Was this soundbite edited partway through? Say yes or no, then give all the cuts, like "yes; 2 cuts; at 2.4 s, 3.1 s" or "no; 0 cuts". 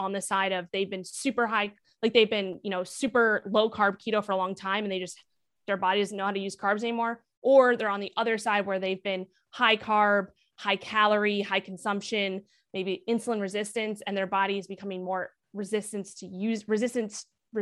no; 0 cuts